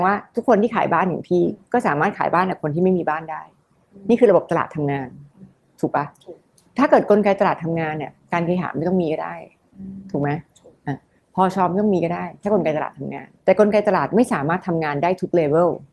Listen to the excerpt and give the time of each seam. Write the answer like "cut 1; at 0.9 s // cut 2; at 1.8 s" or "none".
cut 1; at 8.2 s // cut 2; at 13.3 s